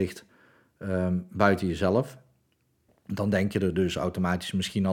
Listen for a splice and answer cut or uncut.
cut